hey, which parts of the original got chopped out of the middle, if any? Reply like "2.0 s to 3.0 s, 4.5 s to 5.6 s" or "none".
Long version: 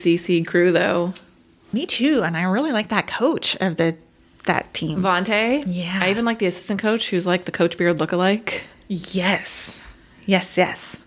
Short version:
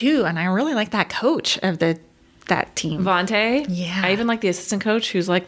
none